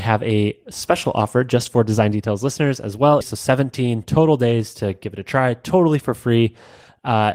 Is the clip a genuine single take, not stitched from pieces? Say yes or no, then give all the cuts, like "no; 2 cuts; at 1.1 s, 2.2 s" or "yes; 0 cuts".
no; 1 cut; at 3.2 s